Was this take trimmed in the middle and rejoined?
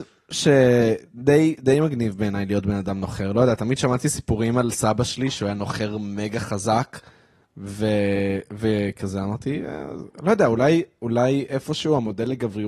no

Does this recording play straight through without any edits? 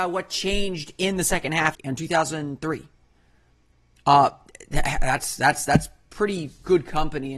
no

